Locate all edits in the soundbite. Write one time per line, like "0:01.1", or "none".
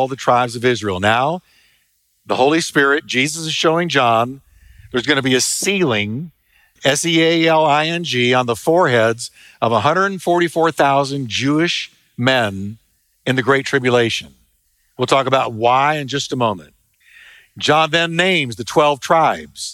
none

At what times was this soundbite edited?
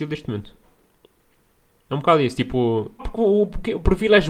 0:01.7
0:03.0

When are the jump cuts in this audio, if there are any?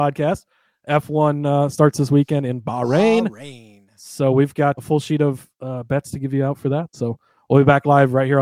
0:04.8

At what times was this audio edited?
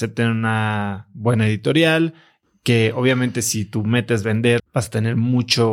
0:04.6

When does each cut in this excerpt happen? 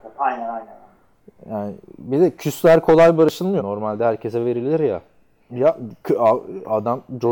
0:03.6
0:05.5

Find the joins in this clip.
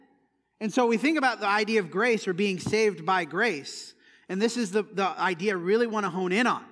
none

